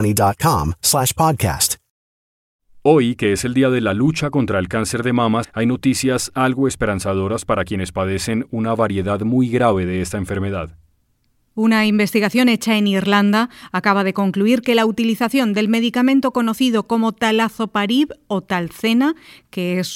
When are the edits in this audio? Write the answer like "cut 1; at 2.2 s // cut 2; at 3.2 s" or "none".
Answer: cut 1; at 5.4 s